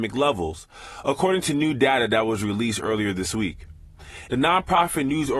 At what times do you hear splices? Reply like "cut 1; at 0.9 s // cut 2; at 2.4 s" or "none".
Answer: cut 1; at 4.3 s